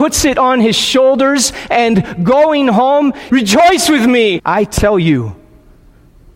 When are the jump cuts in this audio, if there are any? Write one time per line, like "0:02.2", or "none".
0:03.3
0:04.4